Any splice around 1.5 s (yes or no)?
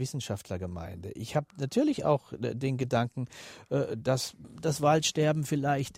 yes